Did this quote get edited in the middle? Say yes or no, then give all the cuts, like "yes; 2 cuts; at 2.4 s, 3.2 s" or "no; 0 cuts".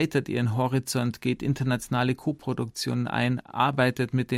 no; 0 cuts